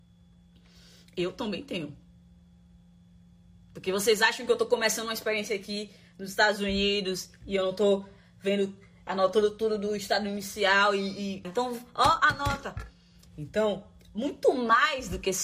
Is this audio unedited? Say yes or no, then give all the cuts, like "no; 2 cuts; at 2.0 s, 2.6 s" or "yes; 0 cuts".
no; 2 cuts; at 11.4 s, 13.3 s